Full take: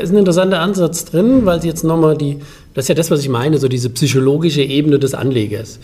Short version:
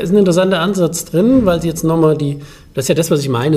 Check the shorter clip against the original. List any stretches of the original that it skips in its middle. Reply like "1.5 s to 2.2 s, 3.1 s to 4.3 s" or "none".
none